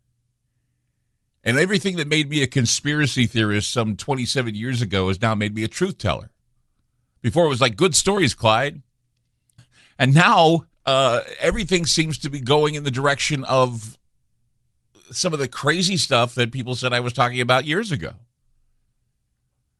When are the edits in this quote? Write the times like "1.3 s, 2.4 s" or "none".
9.6 s, 10.7 s